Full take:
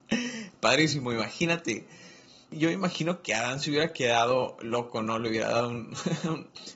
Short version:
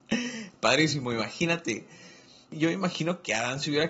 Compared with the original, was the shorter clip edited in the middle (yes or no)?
no